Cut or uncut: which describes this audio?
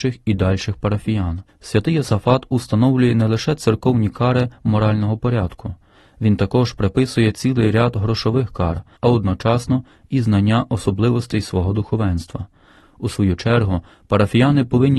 cut